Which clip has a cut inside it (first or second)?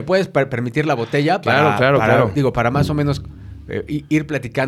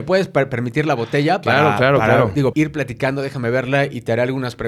second